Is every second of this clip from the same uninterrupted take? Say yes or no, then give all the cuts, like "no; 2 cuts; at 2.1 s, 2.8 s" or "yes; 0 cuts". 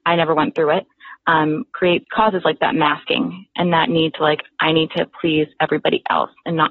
no; 1 cut; at 2.0 s